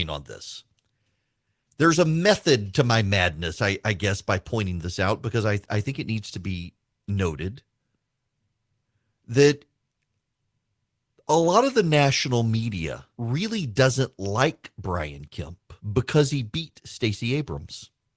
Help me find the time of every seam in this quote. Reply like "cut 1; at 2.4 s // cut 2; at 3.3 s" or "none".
cut 1; at 13.1 s // cut 2; at 15.8 s